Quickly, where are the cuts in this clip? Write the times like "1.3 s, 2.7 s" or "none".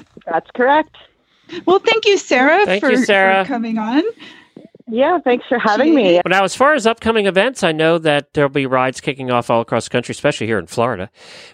6.2 s